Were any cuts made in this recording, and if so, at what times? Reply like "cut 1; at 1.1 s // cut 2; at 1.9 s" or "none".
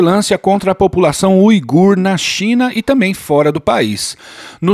none

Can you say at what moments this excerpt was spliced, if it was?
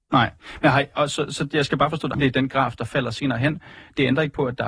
cut 1; at 2.1 s

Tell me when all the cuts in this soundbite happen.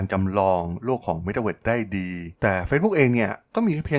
cut 1; at 2.4 s

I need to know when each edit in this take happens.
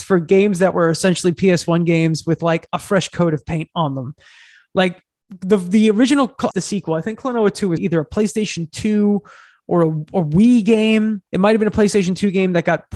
cut 1; at 6.5 s // cut 2; at 7.8 s // cut 3; at 11.3 s

